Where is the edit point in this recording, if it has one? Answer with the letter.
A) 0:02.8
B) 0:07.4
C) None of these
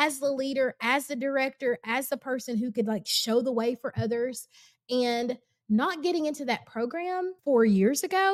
B